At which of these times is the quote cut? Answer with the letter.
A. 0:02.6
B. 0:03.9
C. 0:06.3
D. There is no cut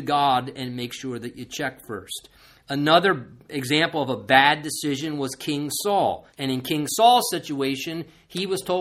C